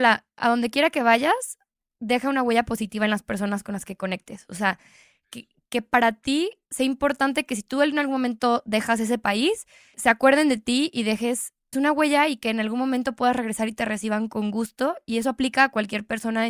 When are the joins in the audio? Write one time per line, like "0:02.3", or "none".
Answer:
0:09.9
0:11.7